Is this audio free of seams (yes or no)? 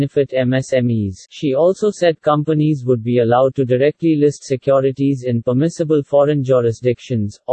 no